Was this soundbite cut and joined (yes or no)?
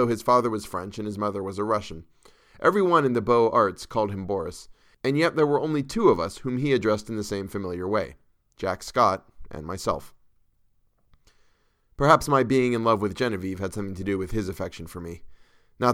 no